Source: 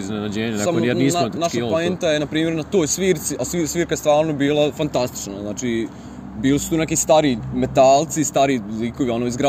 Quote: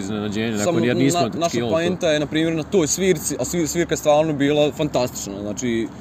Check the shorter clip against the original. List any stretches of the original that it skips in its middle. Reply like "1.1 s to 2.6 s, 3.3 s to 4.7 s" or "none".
none